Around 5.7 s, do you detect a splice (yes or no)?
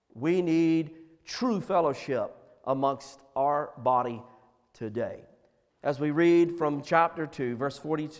yes